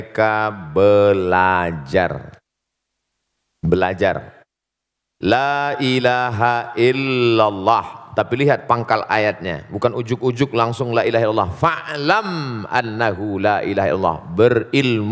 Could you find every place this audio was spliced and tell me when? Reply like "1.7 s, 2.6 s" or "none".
none